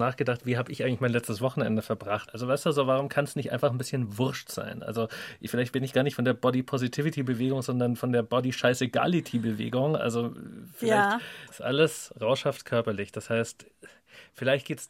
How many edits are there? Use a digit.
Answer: 2